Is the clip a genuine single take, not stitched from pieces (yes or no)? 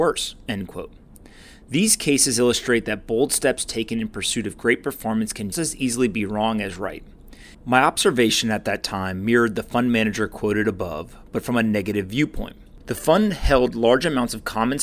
no